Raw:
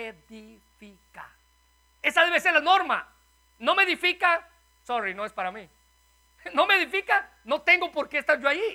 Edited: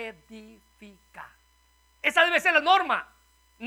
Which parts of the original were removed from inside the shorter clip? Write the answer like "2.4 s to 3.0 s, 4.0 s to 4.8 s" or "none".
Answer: none